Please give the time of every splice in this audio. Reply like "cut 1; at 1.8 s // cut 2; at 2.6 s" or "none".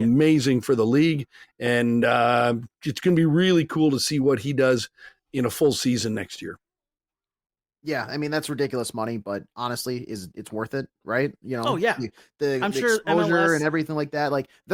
none

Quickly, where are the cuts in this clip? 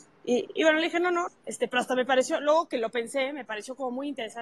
cut 1; at 1.3 s

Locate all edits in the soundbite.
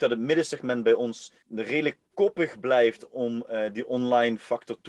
cut 1; at 1.4 s

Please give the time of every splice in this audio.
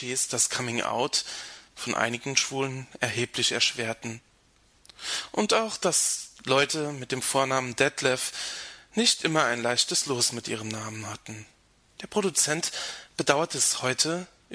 cut 1; at 11.9 s

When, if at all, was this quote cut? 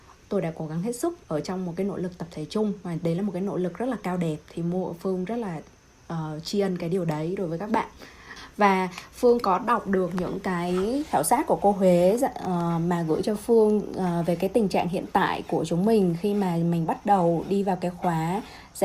none

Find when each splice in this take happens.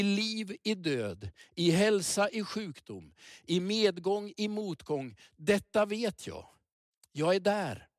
none

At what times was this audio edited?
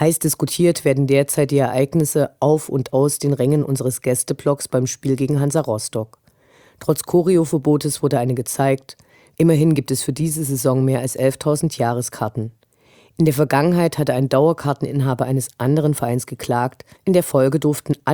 cut 1; at 9.3 s // cut 2; at 17.0 s

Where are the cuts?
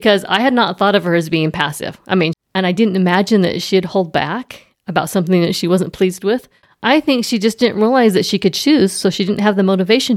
cut 1; at 2.3 s

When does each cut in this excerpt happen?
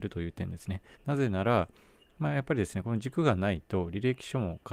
cut 1; at 0.9 s

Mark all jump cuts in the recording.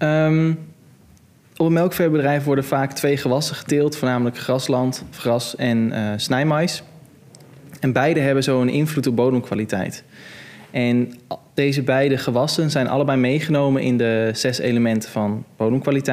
none

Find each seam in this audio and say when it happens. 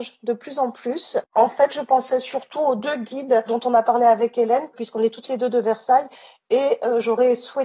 cut 1; at 1.2 s

